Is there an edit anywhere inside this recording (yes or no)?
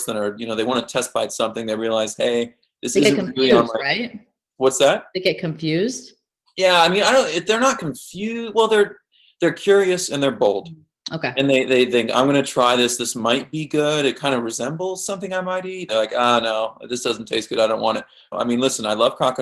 yes